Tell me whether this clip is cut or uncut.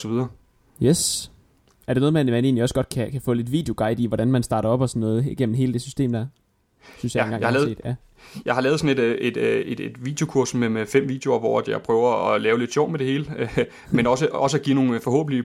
uncut